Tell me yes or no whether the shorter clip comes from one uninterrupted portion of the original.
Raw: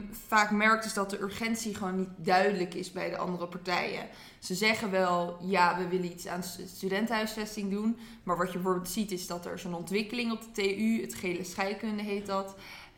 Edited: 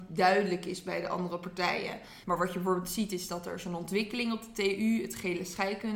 no